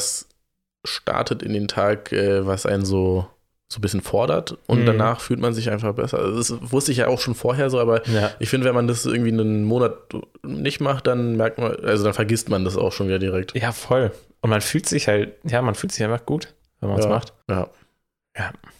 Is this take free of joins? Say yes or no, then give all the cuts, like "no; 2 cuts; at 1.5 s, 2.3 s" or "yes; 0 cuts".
yes; 0 cuts